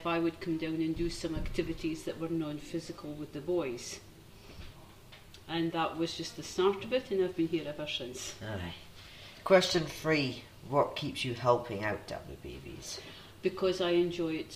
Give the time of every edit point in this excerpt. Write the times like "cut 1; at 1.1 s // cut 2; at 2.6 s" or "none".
none